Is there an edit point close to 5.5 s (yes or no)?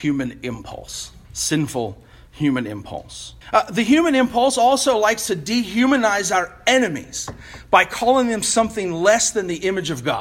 no